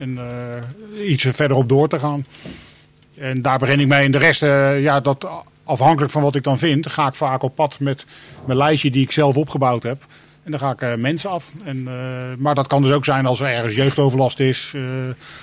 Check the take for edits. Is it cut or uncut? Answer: uncut